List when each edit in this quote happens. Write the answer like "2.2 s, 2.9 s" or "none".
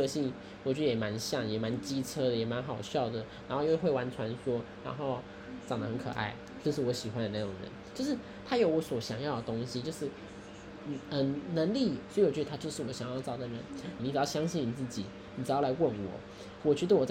12.1 s, 14.0 s